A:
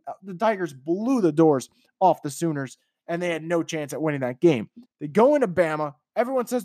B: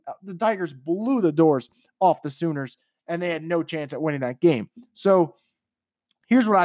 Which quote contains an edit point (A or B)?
A